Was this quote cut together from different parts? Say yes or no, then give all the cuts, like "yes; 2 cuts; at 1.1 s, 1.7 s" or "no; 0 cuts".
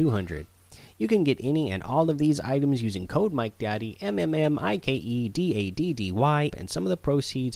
yes; 1 cut; at 6.5 s